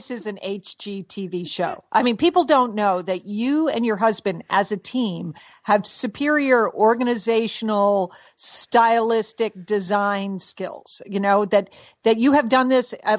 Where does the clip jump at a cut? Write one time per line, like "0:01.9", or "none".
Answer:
none

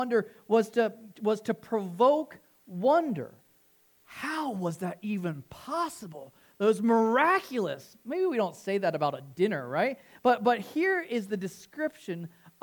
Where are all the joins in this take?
none

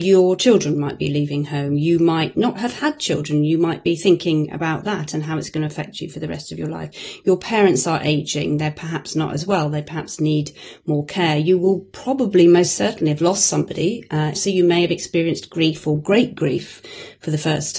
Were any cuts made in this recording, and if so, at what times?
0:14.3

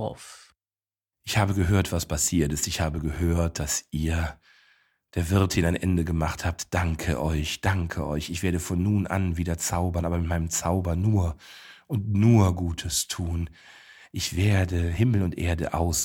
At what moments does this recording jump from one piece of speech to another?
0:14.0

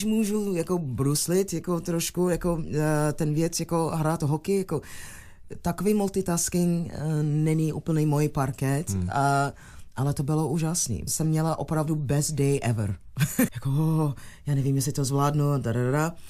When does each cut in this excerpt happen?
0:11.1
0:13.5

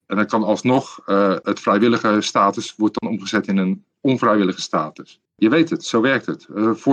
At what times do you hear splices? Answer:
0:05.3

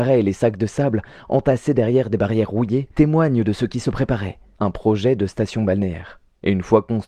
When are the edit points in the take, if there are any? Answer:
none

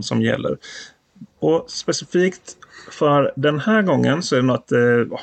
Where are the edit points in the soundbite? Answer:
none

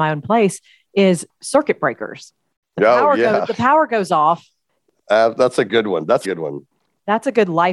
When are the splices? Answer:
0:06.2

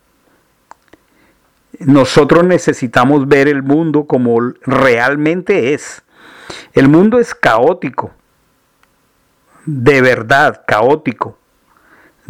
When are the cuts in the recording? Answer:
none

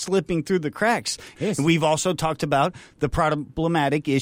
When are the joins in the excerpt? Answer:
0:01.3

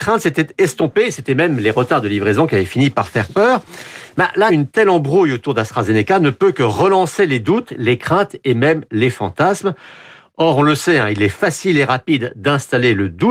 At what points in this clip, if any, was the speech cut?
none

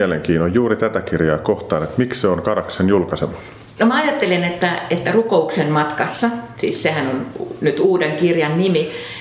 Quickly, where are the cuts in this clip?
none

